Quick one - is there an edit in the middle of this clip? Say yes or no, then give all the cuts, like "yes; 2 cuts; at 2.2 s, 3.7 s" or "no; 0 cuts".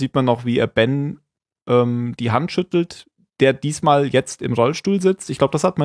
no; 0 cuts